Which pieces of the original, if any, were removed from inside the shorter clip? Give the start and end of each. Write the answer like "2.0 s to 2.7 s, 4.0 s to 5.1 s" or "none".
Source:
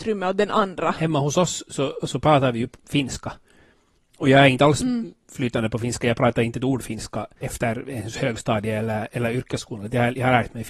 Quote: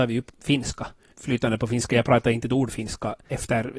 3.6 s to 5.2 s